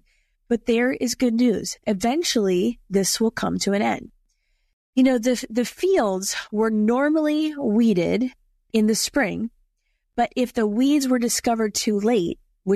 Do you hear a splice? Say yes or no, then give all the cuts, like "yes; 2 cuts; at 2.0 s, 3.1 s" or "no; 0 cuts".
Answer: no; 0 cuts